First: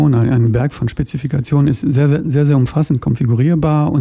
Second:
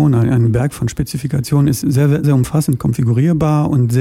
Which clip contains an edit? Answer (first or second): second